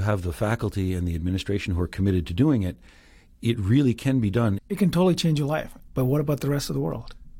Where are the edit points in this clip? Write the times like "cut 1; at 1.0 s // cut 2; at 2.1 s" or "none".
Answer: cut 1; at 4.6 s // cut 2; at 5.9 s